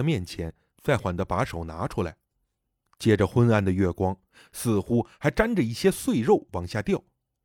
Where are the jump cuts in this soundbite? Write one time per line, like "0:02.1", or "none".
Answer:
0:01.0
0:04.5

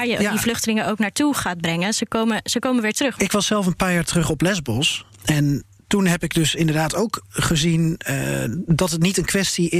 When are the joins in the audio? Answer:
0:03.2
0:05.1

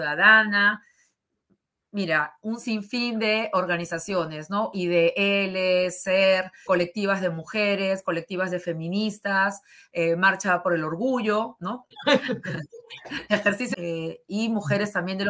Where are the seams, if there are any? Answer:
0:06.7
0:11.9
0:13.7

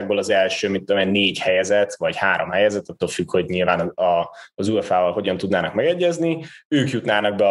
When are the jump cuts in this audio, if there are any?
none

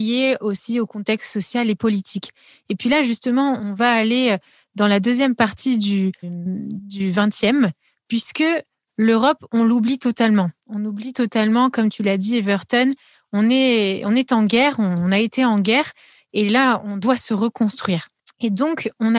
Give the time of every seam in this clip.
0:06.2

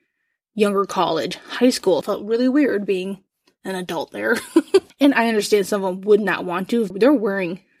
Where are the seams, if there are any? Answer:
0:02.0
0:04.9
0:06.9

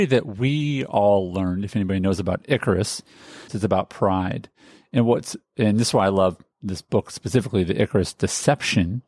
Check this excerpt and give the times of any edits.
0:03.5

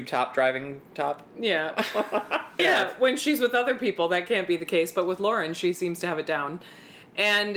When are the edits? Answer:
0:02.6

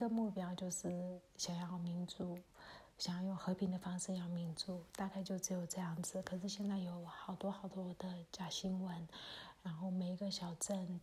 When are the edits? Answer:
none

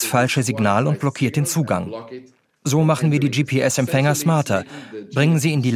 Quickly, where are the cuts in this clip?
none

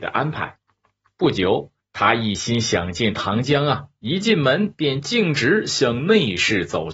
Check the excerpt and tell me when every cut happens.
0:01.8

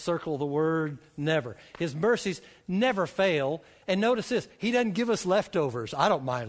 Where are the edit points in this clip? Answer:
none

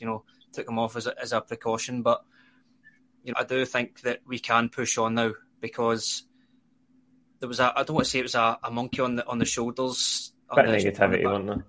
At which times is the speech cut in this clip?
0:03.3

